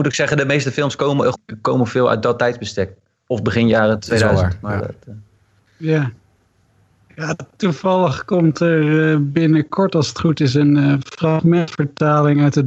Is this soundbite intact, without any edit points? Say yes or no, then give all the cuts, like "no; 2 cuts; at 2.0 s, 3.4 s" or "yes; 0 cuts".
no; 1 cut; at 1.3 s